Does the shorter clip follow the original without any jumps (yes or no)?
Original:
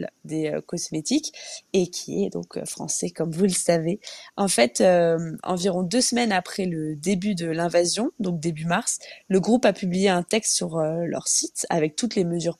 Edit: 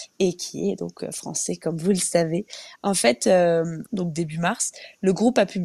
no